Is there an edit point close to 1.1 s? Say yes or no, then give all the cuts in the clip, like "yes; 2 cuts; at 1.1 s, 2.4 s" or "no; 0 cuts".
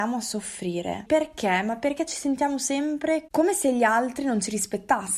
yes; 1 cut; at 1.1 s